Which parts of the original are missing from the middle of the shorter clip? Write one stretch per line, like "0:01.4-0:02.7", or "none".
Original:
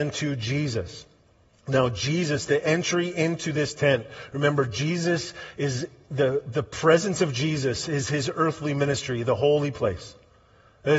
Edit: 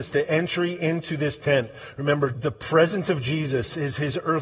0:04.7-0:06.4